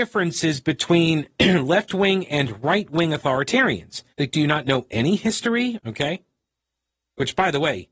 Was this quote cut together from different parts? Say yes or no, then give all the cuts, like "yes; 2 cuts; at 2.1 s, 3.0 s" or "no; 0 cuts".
yes; 2 cuts; at 4.1 s, 5.8 s